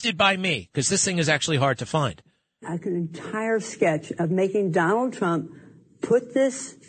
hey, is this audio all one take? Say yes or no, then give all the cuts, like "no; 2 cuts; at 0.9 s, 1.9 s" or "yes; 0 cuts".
yes; 0 cuts